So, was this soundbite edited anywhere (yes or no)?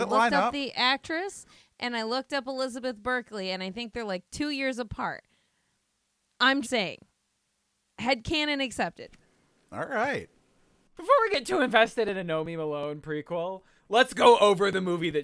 yes